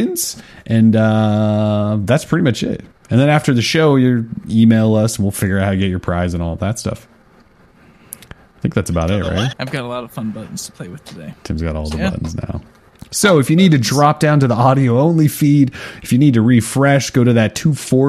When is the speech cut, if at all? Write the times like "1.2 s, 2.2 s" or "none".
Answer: 9.5 s